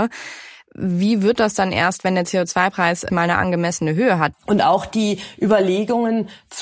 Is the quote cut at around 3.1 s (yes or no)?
yes